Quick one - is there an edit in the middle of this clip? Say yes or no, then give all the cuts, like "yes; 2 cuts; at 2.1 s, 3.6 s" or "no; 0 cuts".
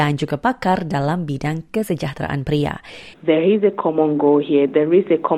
yes; 1 cut; at 3.1 s